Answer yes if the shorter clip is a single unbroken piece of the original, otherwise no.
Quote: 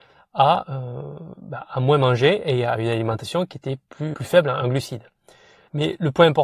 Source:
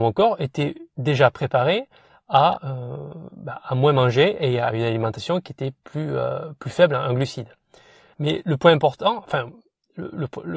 no